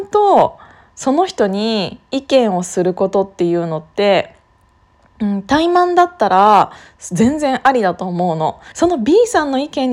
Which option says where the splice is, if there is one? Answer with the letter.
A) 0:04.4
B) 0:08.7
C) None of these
B